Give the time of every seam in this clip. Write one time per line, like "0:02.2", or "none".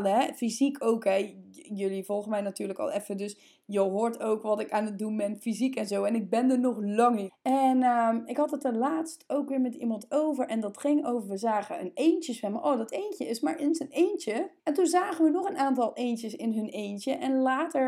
0:07.3
0:14.6